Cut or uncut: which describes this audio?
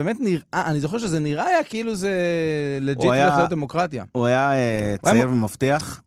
uncut